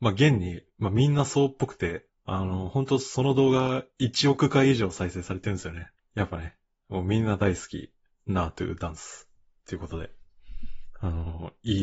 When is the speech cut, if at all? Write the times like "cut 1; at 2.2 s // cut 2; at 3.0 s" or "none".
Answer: cut 1; at 6.0 s

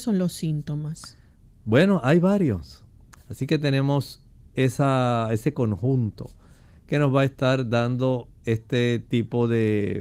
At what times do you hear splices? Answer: cut 1; at 3.2 s

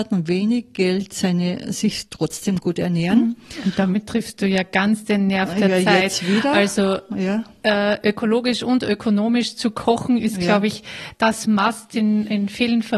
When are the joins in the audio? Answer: none

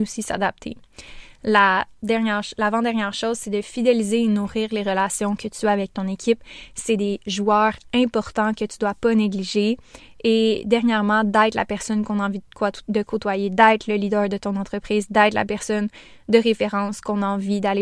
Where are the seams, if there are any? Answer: none

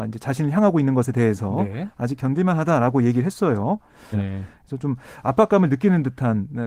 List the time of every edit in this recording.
cut 1; at 4.1 s

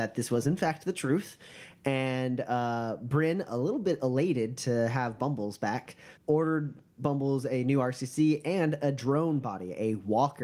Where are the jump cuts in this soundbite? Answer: none

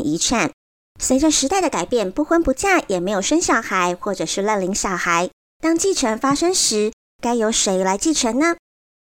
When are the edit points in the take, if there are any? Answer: none

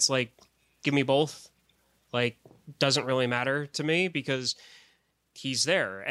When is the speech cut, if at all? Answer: none

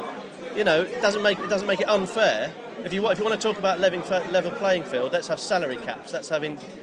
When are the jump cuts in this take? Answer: cut 1; at 1.4 s

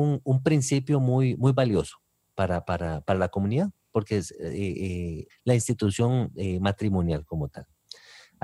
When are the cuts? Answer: cut 1; at 5.3 s

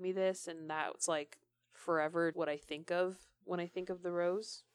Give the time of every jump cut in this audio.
cut 1; at 2.3 s

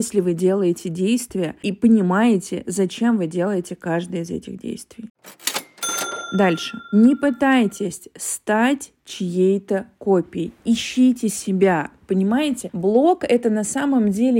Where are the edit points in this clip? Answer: none

